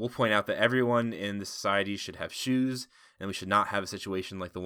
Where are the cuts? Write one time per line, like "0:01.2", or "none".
none

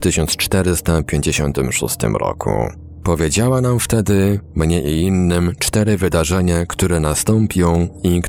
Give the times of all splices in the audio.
none

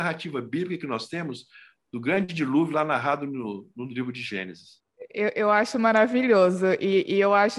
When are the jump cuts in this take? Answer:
none

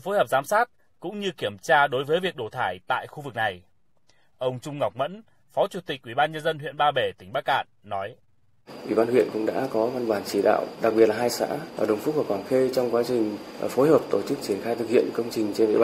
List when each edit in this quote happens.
none

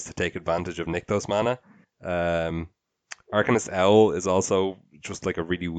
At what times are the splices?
0:01.8

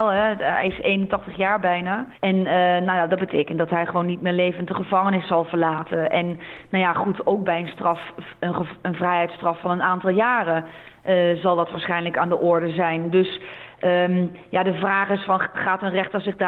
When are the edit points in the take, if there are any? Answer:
0:02.1

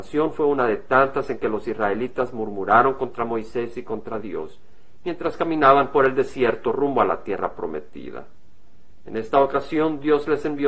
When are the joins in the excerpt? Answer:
none

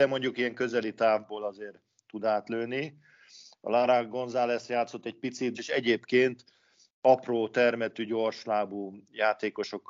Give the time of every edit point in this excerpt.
0:05.5

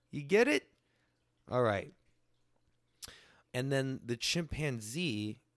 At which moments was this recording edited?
0:03.5

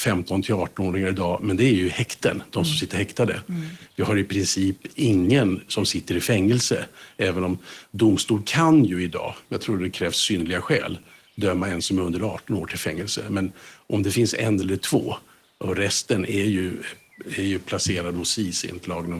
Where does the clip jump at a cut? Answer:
none

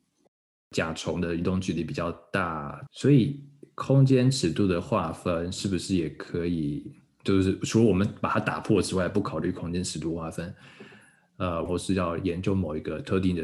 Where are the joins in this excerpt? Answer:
0:02.9
0:11.7

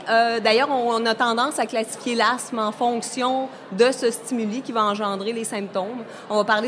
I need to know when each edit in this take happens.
none

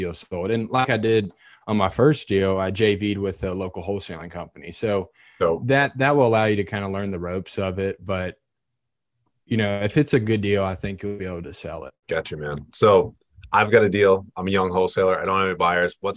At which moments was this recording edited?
0:12.0

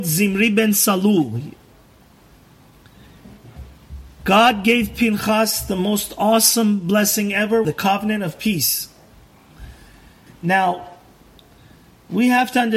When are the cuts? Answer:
0:07.6
0:10.3

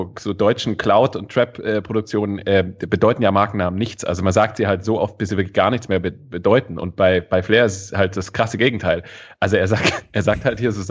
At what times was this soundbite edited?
none

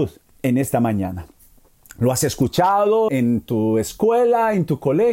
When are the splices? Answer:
0:03.1

